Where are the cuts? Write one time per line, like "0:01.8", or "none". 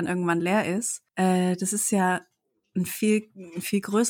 0:01.1